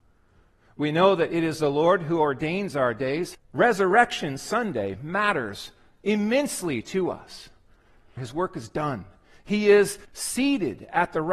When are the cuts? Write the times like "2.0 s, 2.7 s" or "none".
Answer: 3.3 s, 8.2 s, 10.0 s